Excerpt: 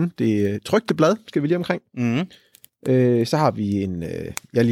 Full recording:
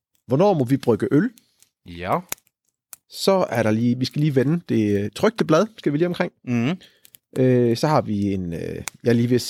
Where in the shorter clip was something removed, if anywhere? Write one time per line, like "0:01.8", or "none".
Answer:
none